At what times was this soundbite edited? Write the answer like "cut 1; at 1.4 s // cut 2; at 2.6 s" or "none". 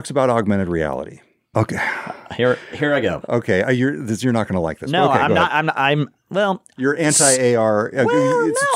cut 1; at 1.5 s